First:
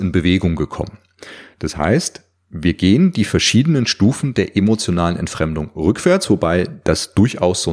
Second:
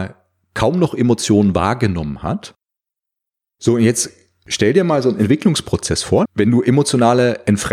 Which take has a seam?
second; 1 cut; at 6.3 s

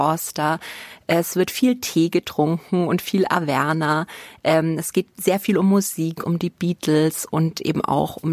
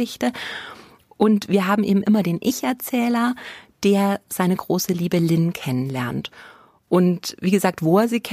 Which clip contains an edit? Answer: first; 1 cut; at 6.2 s

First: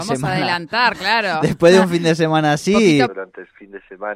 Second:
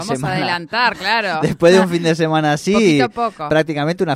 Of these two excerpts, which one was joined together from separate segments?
first; 1 cut; at 3.1 s

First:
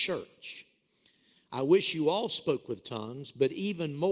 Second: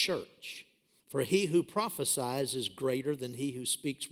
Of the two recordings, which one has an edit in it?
second; 1 cut; at 1.0 s

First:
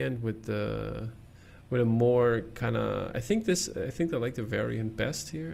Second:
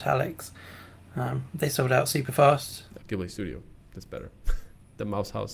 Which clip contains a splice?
second; 1 cut; at 3.0 s

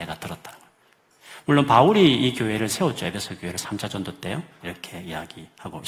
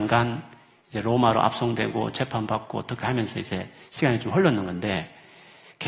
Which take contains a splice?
first; 1 cut; at 4.6 s

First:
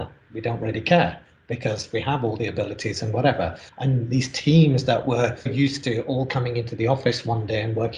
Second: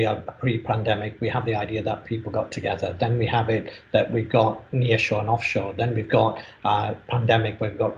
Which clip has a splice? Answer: first; 2 cuts; at 3.7 s, 5.5 s

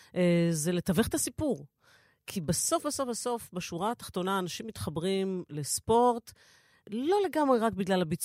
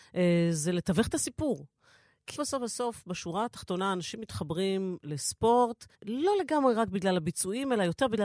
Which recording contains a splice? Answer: second; 2 cuts; at 2.4 s, 5.9 s

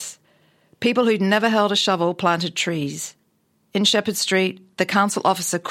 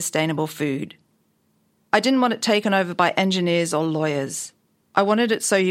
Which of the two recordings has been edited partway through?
second; 1 cut; at 1.8 s

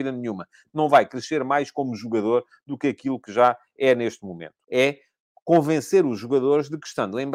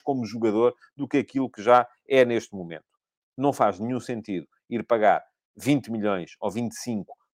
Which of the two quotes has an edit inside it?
first; 1 cut; at 4.6 s

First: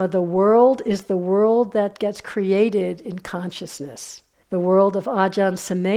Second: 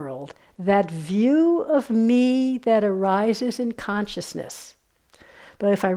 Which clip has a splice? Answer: first; 1 cut; at 4.4 s

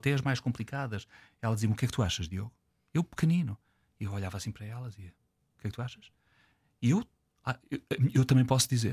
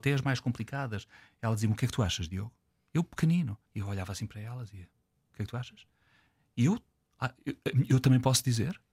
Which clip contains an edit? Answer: second; 1 cut; at 3.7 s

